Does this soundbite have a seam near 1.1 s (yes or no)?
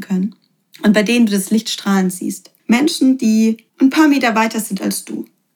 no